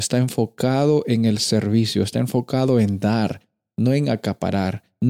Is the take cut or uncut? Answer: uncut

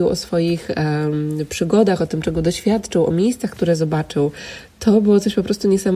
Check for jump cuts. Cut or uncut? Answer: uncut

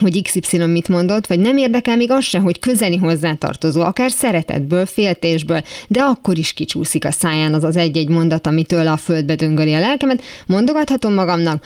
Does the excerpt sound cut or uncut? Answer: uncut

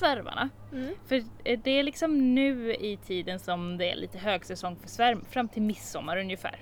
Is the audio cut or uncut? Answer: uncut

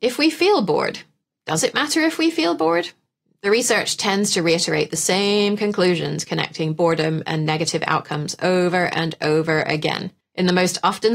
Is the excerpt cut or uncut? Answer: uncut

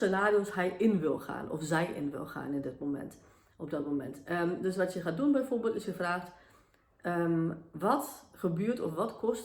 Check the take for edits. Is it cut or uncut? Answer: uncut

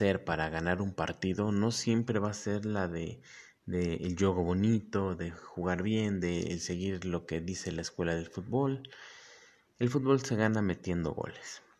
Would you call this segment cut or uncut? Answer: uncut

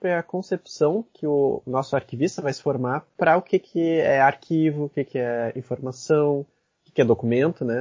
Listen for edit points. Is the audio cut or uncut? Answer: uncut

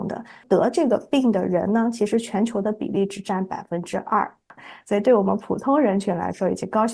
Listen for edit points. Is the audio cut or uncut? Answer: uncut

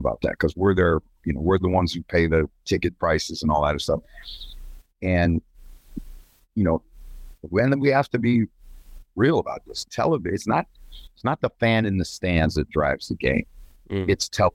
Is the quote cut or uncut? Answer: cut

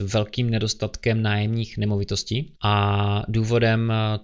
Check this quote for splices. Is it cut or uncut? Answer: cut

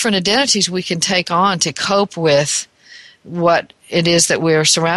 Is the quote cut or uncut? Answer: uncut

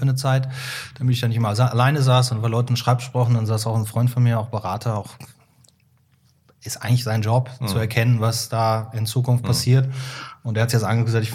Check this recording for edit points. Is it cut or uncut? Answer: uncut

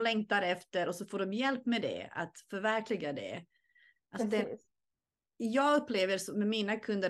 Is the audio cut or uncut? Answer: uncut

